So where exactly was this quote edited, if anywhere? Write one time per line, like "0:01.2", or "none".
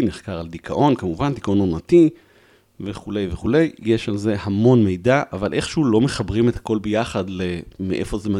none